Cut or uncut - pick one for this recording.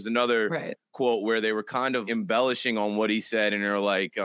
cut